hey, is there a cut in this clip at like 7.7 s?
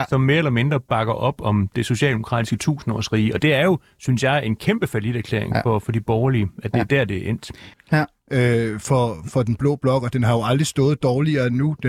yes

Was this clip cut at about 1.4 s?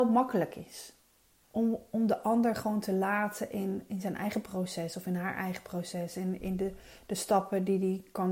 yes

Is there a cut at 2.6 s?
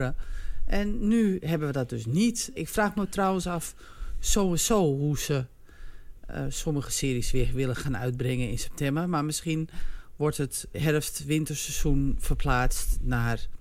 yes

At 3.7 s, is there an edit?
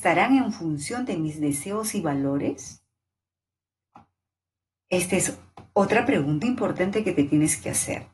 no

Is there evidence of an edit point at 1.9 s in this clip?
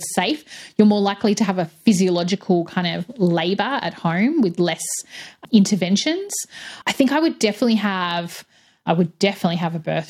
no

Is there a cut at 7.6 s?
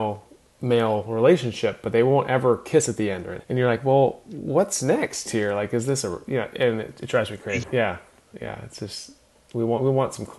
yes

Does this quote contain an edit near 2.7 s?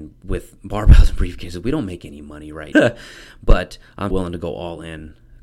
yes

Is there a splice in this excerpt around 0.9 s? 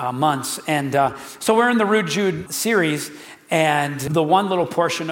no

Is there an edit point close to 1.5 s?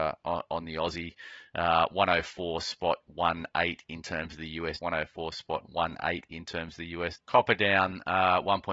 no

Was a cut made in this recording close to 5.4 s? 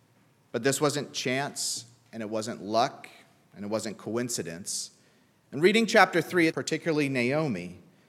yes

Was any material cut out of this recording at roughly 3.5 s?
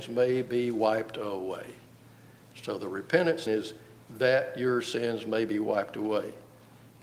yes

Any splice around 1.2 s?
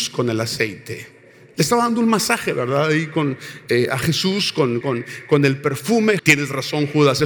no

